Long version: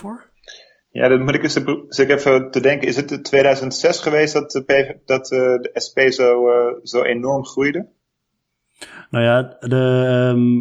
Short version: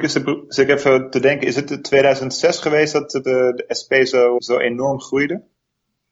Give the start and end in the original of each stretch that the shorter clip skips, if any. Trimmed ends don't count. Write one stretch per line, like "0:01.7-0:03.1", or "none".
0:04.6-0:05.3
0:06.4-0:06.8